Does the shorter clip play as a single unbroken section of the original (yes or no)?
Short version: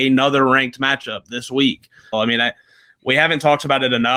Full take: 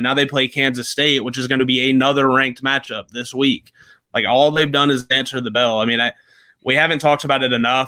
no